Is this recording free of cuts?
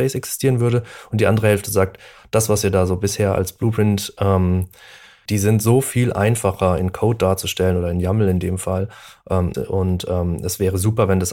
no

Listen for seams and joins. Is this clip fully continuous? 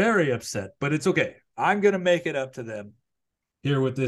yes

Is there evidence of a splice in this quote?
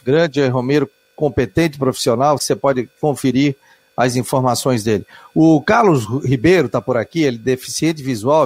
yes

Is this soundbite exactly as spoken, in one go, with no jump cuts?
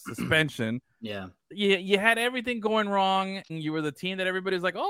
no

